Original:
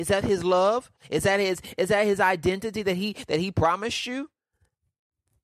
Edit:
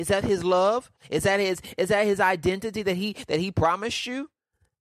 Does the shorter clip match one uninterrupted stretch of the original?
yes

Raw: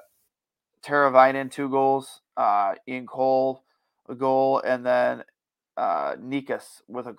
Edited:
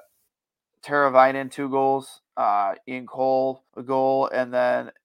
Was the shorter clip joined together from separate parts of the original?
yes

